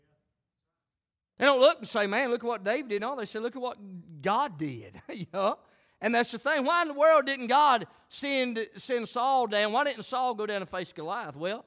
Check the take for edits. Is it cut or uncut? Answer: uncut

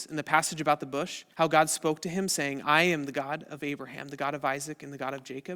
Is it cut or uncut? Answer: cut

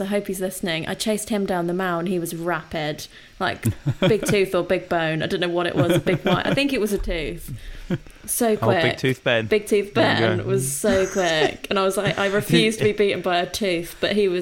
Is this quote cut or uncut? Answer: uncut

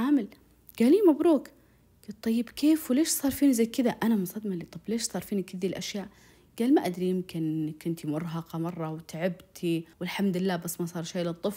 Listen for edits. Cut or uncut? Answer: cut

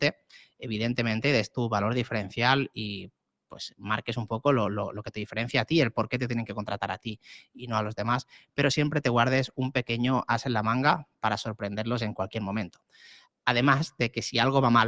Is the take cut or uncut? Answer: uncut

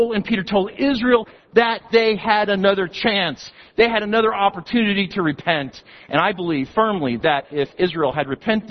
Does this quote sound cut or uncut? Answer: uncut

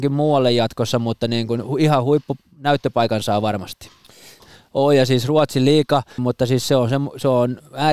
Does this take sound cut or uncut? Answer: cut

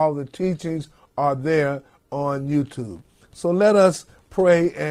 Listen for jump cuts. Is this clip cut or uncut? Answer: uncut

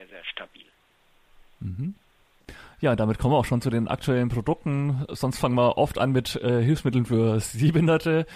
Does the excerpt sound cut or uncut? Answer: uncut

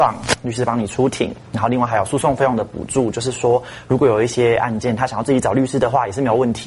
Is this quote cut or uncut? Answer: uncut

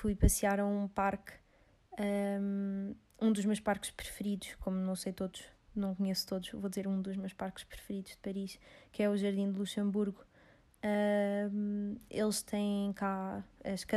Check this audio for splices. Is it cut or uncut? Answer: uncut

